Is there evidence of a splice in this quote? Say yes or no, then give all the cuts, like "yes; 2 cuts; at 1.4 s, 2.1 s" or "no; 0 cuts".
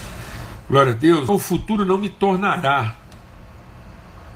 yes; 1 cut; at 1.3 s